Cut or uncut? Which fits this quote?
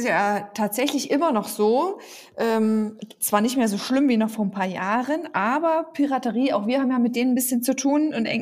uncut